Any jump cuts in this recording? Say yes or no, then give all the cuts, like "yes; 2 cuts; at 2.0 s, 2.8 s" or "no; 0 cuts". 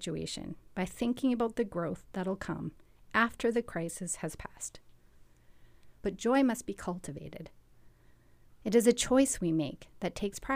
yes; 1 cut; at 6.0 s